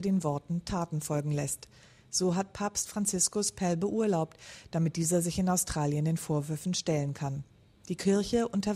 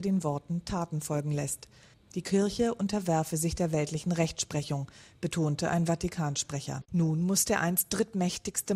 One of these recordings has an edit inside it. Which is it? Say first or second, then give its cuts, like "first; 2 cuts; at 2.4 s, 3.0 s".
second; 2 cuts; at 1.9 s, 6.8 s